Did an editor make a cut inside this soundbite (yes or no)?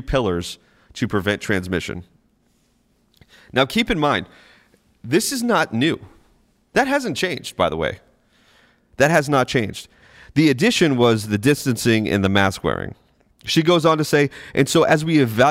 yes